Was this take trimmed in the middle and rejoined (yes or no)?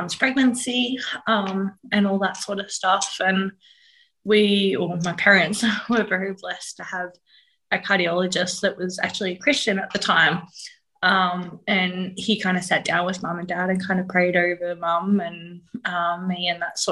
no